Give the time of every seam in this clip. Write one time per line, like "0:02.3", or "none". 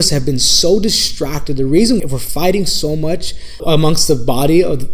0:02.0
0:03.6